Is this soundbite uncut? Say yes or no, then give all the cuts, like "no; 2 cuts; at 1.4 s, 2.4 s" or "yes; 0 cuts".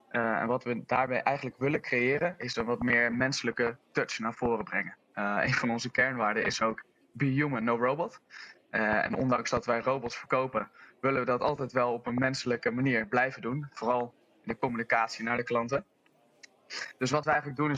yes; 0 cuts